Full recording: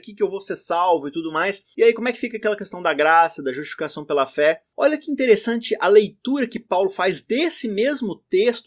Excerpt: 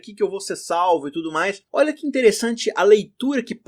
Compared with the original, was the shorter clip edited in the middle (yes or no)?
yes